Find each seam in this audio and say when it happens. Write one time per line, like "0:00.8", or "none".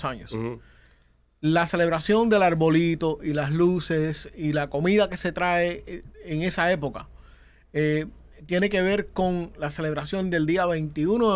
none